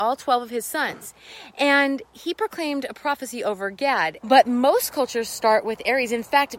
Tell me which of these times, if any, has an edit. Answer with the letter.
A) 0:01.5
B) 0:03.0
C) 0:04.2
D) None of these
C